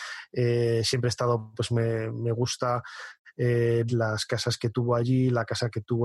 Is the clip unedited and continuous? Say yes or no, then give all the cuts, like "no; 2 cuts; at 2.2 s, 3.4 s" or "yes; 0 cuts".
no; 1 cut; at 3.9 s